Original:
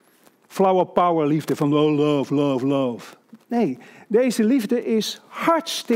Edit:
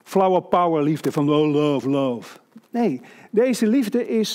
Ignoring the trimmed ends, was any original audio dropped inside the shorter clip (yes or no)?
yes